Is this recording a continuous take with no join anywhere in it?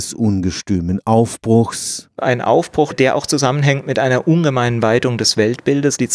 yes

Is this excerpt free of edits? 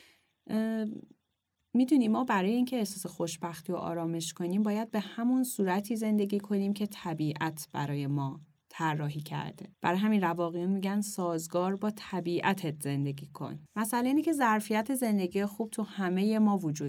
no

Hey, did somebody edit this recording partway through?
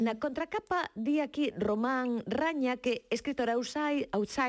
no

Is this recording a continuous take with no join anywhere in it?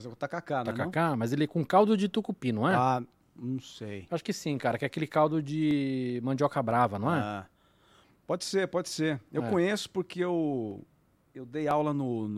yes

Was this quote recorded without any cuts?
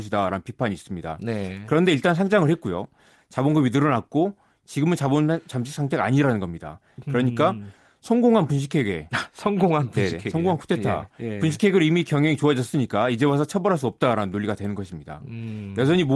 yes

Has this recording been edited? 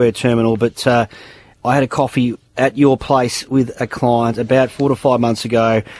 no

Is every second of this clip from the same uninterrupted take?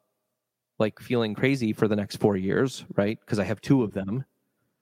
yes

